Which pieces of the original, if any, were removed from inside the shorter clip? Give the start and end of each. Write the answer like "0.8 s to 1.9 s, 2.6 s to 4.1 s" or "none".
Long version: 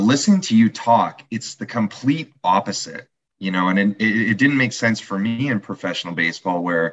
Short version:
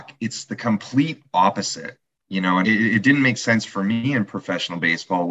3.7 s to 4.0 s